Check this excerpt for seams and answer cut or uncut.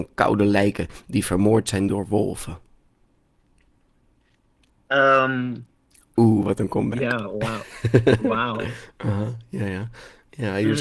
uncut